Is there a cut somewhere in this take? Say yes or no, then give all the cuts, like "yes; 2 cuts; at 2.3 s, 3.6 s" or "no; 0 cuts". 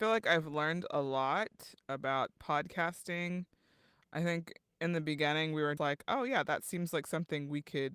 yes; 1 cut; at 5.8 s